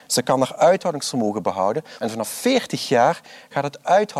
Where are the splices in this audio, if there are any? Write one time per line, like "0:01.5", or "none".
0:02.0